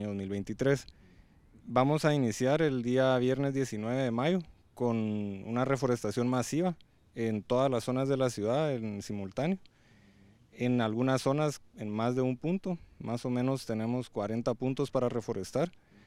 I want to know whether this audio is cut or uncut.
uncut